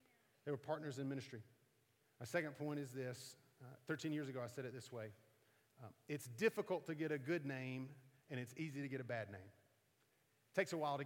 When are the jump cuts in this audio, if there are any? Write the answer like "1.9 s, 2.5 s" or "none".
2.0 s